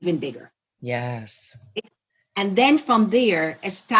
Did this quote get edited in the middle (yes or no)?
no